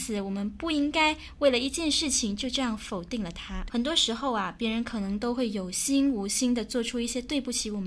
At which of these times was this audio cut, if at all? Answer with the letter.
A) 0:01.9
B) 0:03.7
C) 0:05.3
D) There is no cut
B